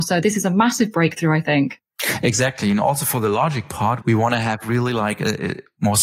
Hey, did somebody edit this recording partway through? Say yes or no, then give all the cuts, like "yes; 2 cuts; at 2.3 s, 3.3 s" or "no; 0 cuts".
yes; 1 cut; at 4.0 s